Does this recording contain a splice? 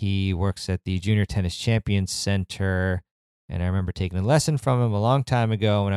no; 0 cuts

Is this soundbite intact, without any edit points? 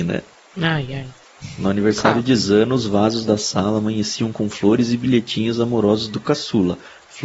yes; 0 cuts

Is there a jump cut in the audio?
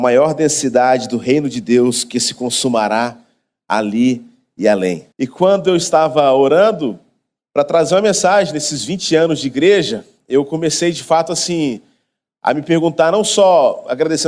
yes; 2 cuts; at 5.1 s, 7.4 s

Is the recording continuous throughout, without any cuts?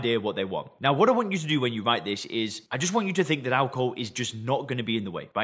yes; 0 cuts

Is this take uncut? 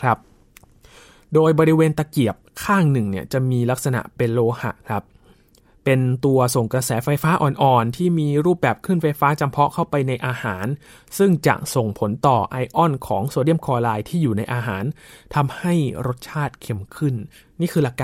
yes; 0 cuts

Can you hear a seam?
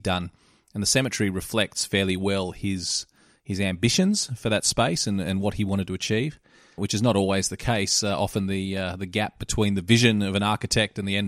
yes; 1 cut; at 6.8 s

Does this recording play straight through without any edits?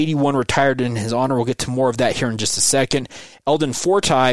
yes; 0 cuts

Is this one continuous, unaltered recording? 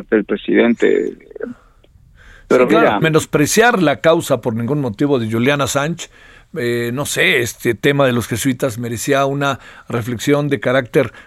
no; 1 cut; at 3.0 s

